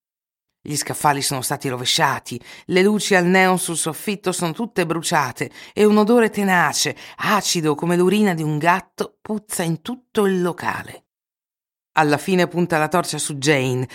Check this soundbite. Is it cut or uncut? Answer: uncut